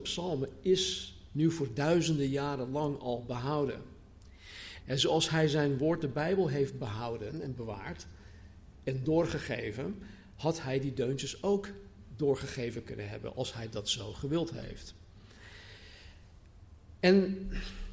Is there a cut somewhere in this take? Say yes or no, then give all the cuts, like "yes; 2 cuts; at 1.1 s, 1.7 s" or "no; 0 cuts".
yes; 1 cut; at 4.8 s